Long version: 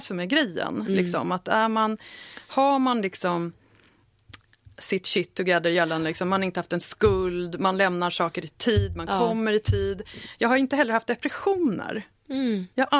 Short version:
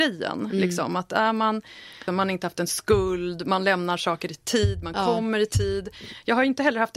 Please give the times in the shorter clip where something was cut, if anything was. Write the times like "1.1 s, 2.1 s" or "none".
2.1 s